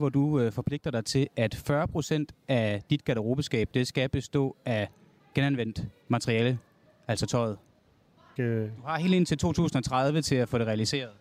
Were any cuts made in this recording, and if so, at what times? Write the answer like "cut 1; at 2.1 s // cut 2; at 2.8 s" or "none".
cut 1; at 8.4 s